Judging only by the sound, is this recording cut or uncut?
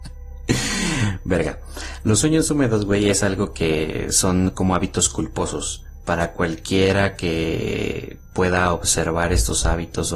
uncut